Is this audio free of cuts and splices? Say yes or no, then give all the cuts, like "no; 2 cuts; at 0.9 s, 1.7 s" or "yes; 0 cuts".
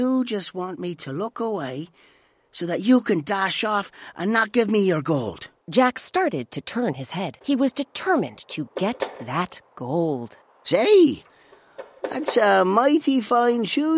no; 2 cuts; at 5.6 s, 7.4 s